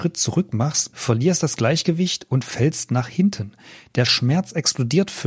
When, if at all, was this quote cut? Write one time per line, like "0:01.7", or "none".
0:00.9

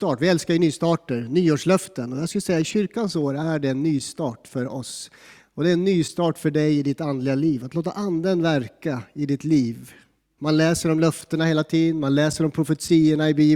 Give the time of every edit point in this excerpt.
0:10.4

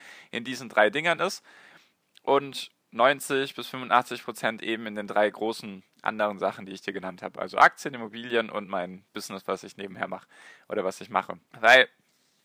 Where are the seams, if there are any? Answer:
0:11.5

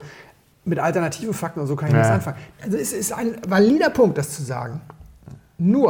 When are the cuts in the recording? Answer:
0:02.5

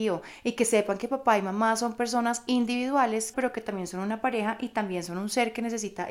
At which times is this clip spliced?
0:03.3

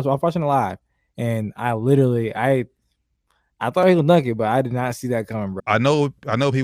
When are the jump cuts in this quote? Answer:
0:05.6

